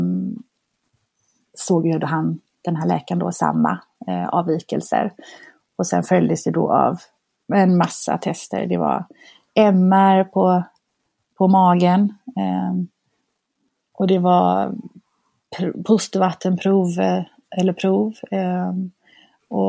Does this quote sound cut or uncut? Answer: uncut